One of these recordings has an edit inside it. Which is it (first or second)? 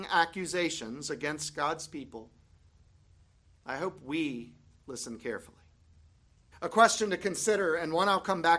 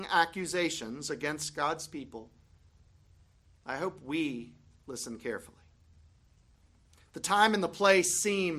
first